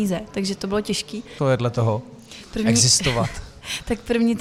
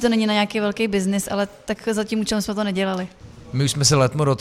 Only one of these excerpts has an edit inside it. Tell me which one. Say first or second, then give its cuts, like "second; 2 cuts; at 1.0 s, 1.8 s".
first; 1 cut; at 1.4 s